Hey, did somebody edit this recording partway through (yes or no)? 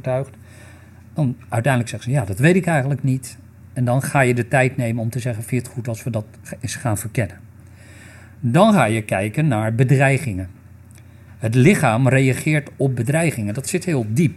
no